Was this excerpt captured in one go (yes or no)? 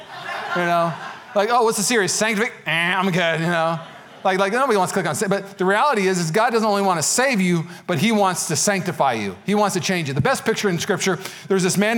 yes